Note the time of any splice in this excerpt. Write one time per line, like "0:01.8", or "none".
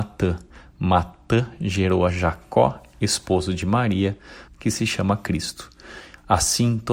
0:02.9
0:04.5